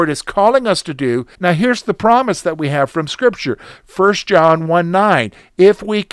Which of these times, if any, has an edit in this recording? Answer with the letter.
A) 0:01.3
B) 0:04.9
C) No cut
A